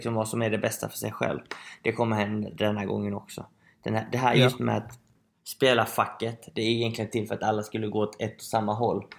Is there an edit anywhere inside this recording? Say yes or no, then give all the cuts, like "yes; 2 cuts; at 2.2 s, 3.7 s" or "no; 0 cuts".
no; 0 cuts